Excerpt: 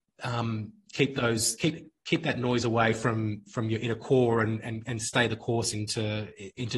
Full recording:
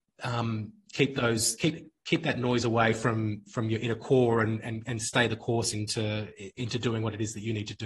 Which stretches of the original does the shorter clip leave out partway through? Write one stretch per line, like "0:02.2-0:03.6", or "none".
none